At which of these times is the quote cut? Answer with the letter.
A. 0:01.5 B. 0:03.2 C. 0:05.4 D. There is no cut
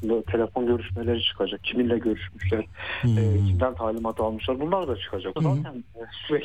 C